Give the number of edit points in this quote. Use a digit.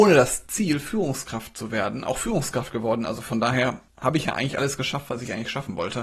1